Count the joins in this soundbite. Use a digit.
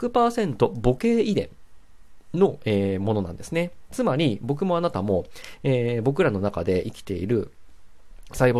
0